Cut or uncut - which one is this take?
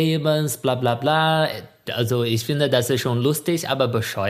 cut